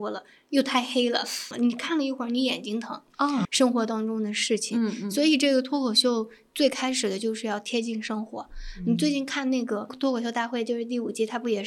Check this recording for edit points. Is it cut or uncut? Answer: cut